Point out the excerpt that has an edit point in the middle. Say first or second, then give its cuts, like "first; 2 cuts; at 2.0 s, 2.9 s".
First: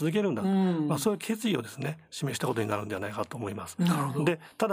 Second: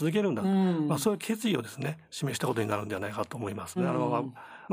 second; 1 cut; at 3.8 s